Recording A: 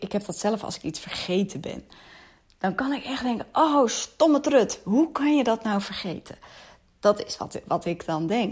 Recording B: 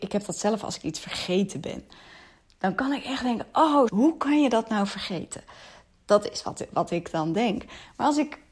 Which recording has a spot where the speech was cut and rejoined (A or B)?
B